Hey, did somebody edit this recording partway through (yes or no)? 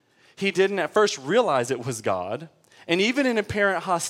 no